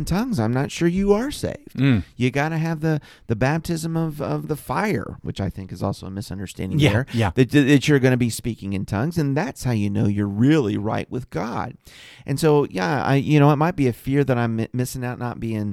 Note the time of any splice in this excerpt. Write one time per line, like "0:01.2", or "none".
0:04.4